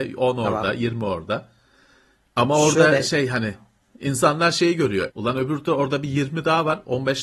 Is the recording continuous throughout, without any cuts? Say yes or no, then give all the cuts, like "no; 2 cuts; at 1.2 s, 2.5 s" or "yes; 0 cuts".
no; 1 cut; at 5.1 s